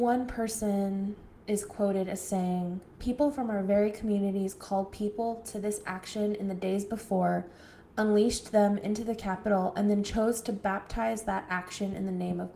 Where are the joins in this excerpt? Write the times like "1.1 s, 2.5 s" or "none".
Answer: none